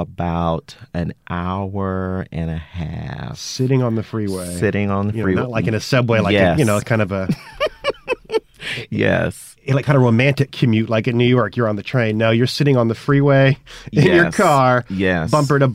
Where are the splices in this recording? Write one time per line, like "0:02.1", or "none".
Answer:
none